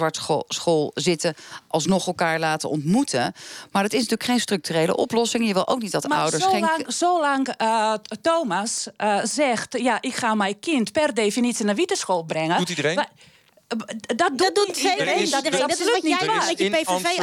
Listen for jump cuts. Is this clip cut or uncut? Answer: uncut